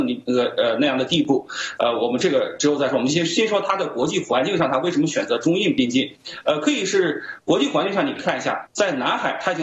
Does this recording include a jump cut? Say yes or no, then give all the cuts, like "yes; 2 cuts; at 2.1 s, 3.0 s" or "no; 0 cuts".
no; 0 cuts